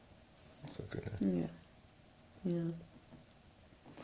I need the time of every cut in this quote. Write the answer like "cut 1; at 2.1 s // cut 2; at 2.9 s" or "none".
none